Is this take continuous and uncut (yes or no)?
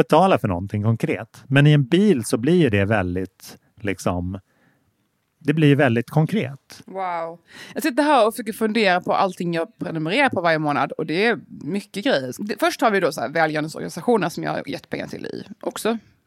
yes